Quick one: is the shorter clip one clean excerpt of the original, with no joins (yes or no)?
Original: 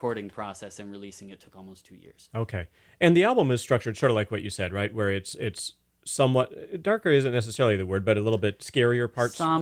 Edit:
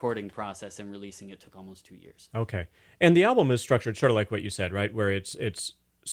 yes